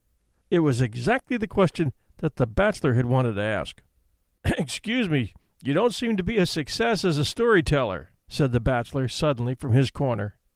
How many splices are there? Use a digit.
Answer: 2